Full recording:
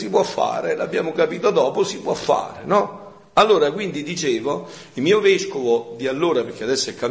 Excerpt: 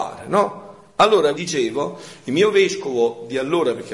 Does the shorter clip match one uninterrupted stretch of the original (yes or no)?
no